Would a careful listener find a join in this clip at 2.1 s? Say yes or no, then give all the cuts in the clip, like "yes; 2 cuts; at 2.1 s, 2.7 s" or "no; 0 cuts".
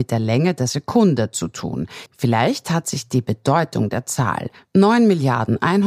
yes; 1 cut; at 2.1 s